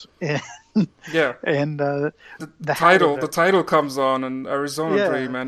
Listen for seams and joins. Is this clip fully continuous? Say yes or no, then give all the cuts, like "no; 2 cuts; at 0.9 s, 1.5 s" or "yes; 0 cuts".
no; 1 cut; at 2.4 s